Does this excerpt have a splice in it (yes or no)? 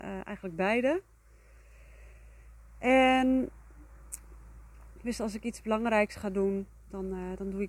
no